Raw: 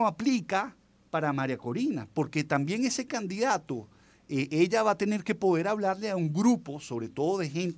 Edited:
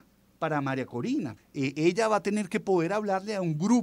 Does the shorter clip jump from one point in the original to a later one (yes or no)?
yes